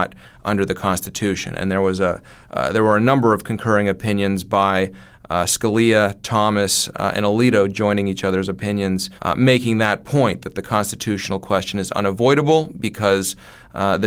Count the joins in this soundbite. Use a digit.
1